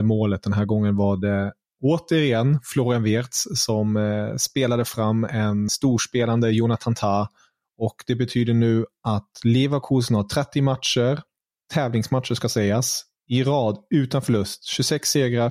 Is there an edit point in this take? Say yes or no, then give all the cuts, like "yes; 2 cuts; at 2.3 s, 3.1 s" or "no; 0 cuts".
yes; 1 cut; at 5.7 s